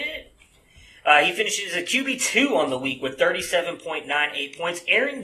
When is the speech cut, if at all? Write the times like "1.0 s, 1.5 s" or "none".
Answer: none